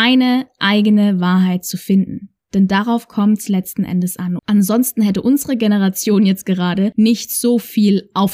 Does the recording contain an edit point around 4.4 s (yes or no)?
yes